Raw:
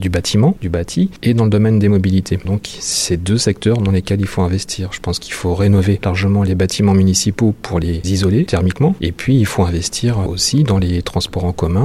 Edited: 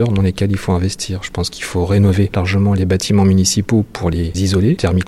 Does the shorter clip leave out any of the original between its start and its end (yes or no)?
no